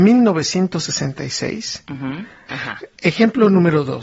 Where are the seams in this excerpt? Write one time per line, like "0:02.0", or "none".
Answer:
0:02.5